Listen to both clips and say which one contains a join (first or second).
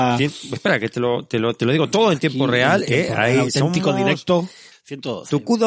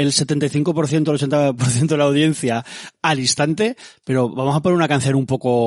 first